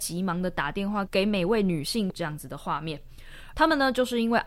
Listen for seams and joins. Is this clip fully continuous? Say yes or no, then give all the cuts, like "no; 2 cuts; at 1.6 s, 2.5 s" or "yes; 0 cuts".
no; 1 cut; at 3.5 s